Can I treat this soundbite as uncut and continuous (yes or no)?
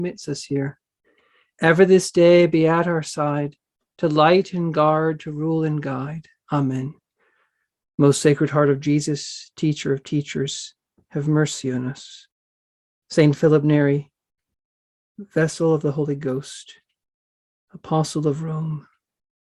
yes